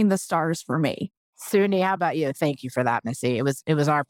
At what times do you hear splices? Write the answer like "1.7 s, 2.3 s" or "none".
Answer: none